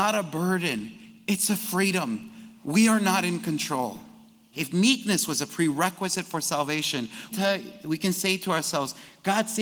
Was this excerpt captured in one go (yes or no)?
no